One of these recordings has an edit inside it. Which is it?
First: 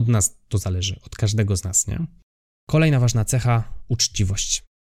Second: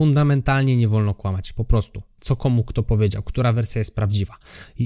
second; 1 cut; at 2.2 s

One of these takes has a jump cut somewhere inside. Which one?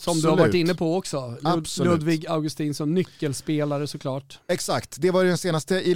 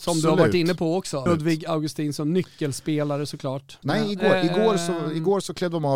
second; 2 cuts; at 1.3 s, 3.8 s

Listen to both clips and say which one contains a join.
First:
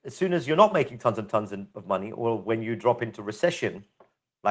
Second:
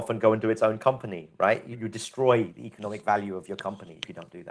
second; 1 cut; at 1.7 s

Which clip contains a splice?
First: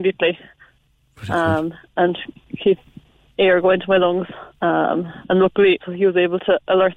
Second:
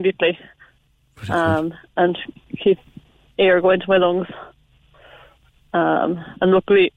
first; 2 cuts; at 4.5 s, 5.8 s

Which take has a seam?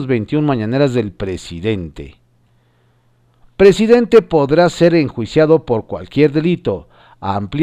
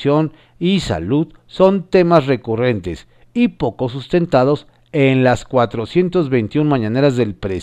first; 1 cut; at 3.4 s

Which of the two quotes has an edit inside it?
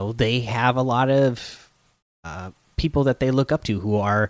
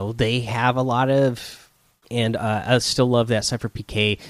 second; 1 cut; at 2.0 s

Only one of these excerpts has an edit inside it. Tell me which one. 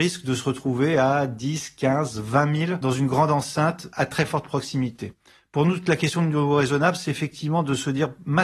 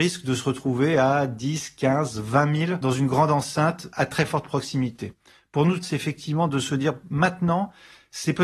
second; 1 cut; at 5.8 s

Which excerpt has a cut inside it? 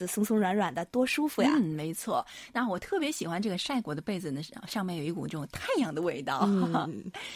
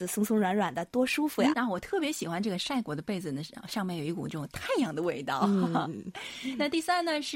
second; 1 cut; at 1.5 s

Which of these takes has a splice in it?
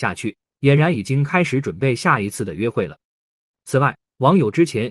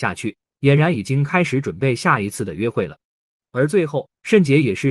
second; 1 cut; at 3.4 s

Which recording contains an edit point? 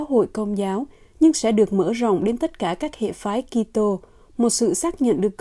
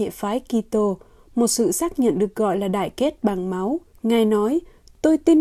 second; 1 cut; at 3.9 s

